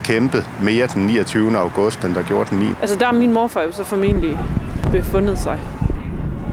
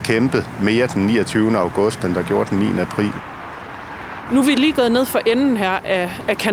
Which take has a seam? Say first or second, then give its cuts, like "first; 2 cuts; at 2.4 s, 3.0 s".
first; 1 cut; at 2.7 s